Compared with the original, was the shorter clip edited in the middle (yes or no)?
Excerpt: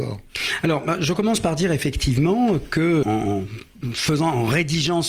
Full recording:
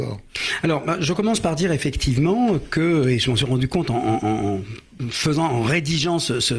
yes